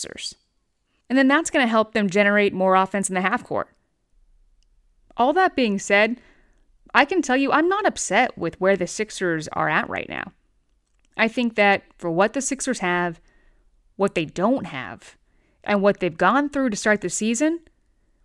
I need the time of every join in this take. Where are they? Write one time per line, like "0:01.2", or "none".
0:01.0